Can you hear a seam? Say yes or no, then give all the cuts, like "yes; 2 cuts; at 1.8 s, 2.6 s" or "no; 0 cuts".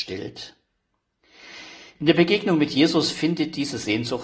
yes; 1 cut; at 1.9 s